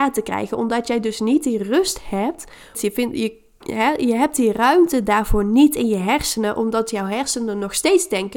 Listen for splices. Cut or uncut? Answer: cut